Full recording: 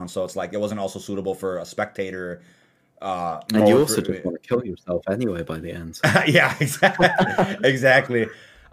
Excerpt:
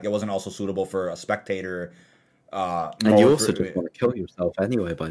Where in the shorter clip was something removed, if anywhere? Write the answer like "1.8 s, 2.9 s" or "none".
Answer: none